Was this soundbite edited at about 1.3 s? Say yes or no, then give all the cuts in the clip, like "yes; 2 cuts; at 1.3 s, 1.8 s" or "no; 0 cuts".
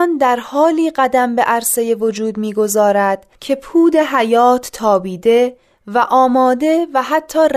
no; 1 cut; at 3.3 s